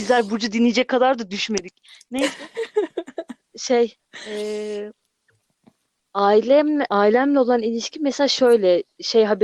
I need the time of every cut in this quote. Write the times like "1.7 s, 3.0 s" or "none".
none